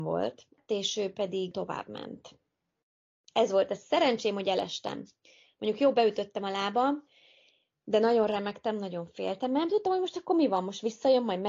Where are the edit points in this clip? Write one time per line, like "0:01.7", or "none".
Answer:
none